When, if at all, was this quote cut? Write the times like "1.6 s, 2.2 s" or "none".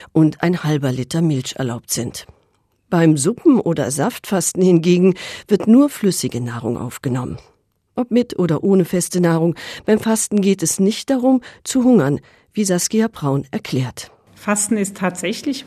none

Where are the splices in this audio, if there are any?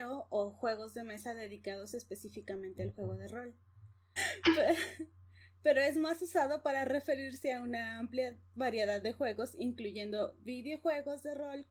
4.2 s

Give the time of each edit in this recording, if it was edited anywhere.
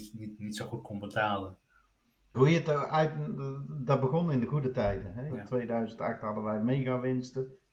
2.3 s, 5.3 s

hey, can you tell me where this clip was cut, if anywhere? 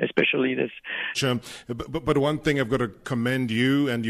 1.1 s

